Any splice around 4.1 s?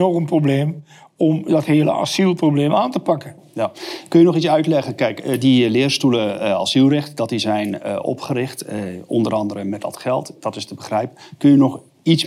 no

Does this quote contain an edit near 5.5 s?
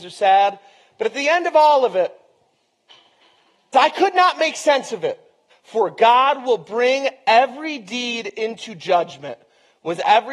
yes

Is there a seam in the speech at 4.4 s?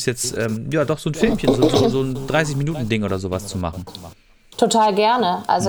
no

